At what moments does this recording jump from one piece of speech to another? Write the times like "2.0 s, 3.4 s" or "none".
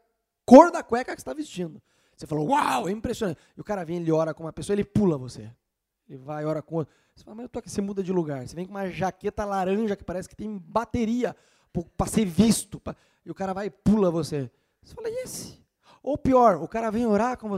none